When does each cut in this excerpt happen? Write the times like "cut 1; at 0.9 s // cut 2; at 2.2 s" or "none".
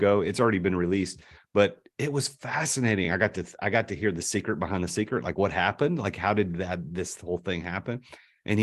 none